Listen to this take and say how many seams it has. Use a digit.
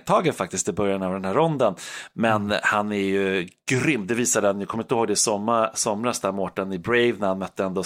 0